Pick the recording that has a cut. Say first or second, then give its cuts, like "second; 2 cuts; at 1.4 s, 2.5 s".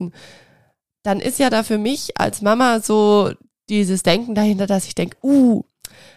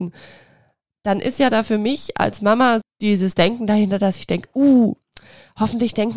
second; 1 cut; at 2.8 s